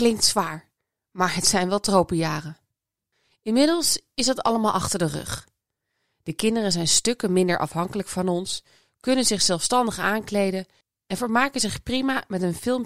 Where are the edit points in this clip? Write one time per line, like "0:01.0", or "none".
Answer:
none

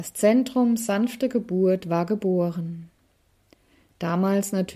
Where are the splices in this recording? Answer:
none

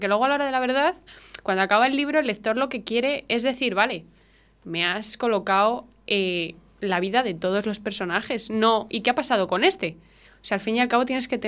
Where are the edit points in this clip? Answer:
none

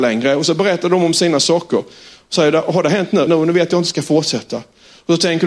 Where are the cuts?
0:03.3

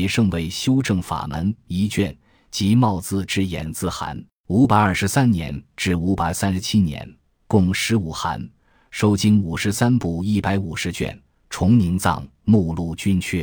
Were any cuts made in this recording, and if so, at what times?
none

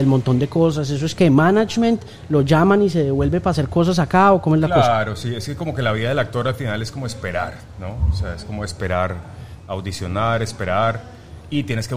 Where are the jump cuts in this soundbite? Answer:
none

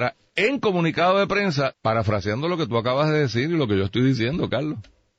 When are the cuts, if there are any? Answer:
0:01.7

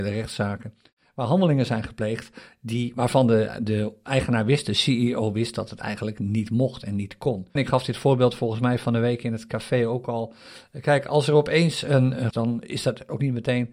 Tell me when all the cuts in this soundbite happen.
0:07.6
0:12.3

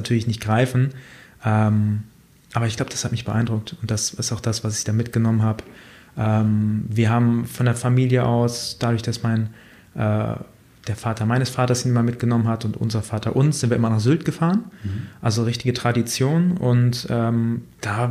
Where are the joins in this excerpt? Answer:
none

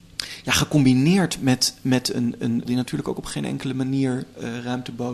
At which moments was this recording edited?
0:02.7

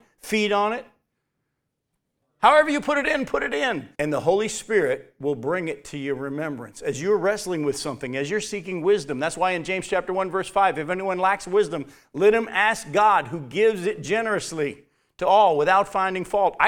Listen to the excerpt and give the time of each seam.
0:02.2
0:03.9

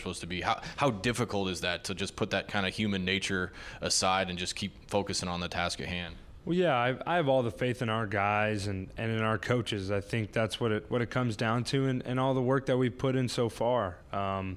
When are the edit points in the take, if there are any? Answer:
none

